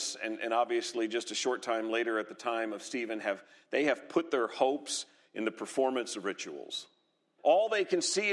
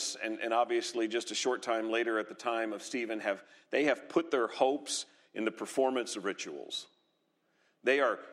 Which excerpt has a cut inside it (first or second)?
first